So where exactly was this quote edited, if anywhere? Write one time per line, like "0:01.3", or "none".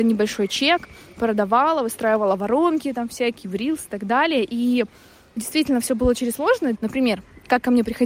0:05.4
0:06.7